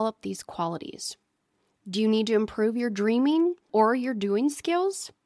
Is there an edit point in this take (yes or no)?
yes